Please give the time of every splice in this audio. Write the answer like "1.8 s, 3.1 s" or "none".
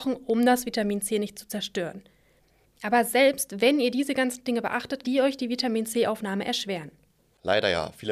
5.0 s